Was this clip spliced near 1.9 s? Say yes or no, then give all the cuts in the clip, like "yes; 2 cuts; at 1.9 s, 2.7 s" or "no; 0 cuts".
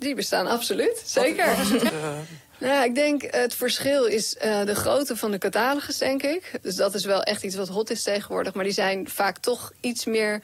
yes; 2 cuts; at 1.9 s, 6.6 s